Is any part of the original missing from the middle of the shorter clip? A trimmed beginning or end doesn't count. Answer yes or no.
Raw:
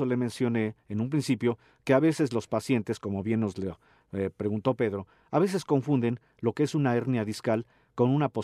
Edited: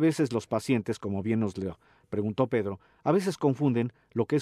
yes